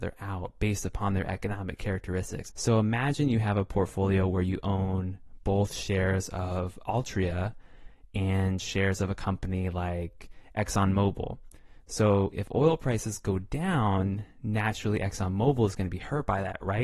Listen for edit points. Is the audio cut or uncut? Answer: cut